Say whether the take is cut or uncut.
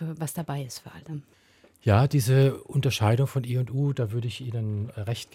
uncut